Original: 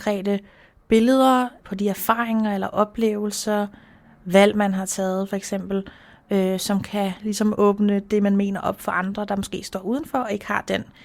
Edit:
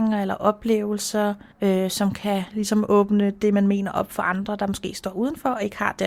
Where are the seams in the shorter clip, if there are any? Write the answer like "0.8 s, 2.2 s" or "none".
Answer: 1.5 s